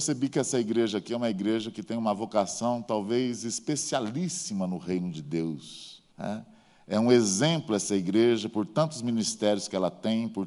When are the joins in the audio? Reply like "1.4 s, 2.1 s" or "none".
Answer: 6.1 s